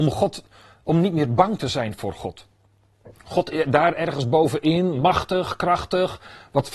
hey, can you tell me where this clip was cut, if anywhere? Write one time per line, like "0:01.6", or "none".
none